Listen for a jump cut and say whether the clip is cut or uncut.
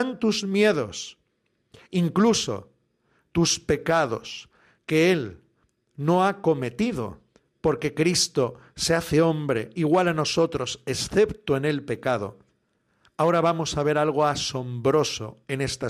uncut